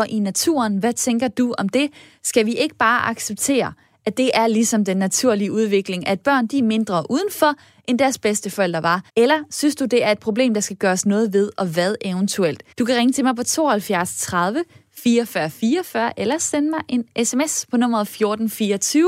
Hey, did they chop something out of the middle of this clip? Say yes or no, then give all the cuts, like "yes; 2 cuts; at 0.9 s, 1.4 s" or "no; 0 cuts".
yes; 2 cuts; at 9.1 s, 12.7 s